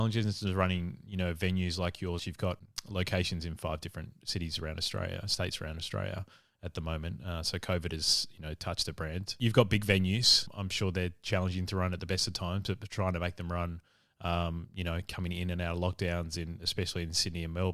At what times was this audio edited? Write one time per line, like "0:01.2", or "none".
0:02.2